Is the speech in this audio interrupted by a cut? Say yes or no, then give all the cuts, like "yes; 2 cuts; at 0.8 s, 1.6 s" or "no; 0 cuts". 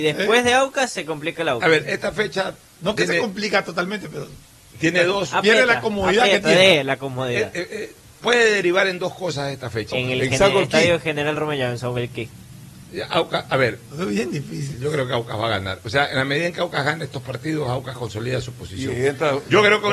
yes; 2 cuts; at 9.9 s, 14.7 s